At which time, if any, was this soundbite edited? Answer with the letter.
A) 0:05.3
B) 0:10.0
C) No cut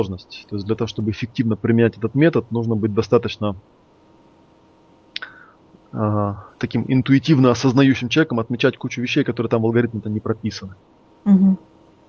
B